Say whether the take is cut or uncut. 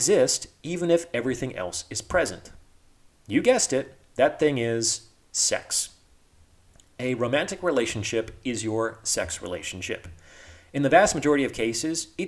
uncut